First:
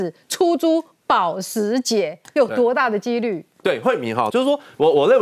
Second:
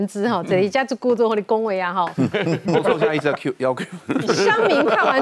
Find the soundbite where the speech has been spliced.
first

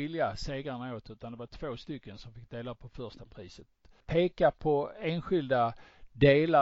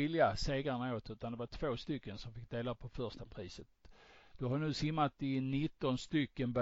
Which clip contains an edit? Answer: first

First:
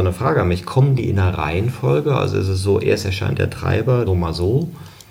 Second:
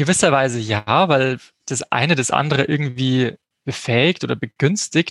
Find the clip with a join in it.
first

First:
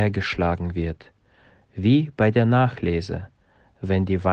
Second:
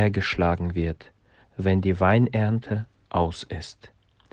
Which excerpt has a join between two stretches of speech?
second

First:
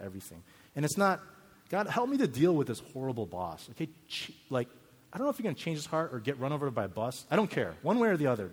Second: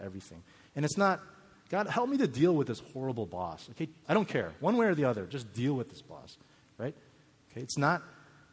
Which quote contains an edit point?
second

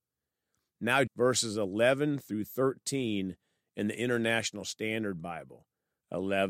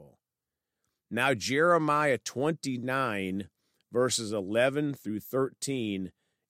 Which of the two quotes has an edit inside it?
first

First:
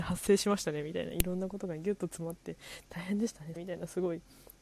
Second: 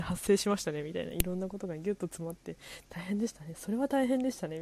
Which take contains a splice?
first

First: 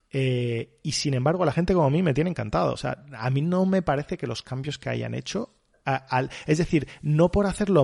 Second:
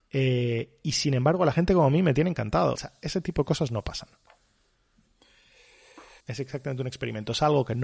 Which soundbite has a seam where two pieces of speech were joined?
second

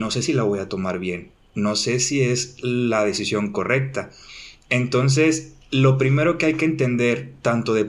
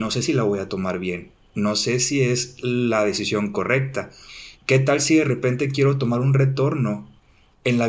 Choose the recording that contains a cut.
second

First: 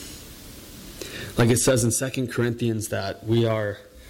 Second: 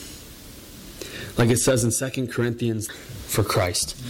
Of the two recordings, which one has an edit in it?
second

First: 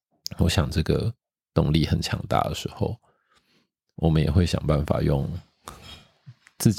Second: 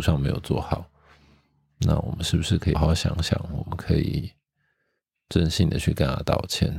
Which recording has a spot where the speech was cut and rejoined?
second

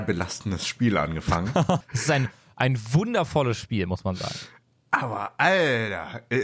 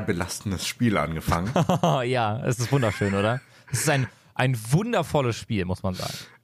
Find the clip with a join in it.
first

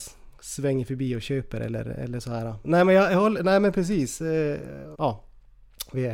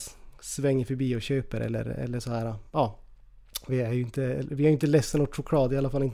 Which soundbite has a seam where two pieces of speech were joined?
first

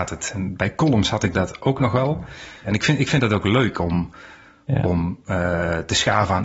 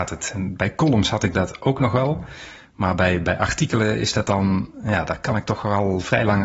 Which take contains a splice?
first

